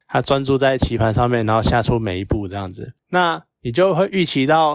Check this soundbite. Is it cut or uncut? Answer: uncut